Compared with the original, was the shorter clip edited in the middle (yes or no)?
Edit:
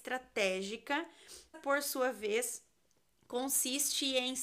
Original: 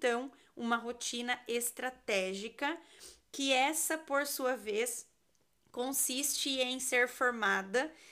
yes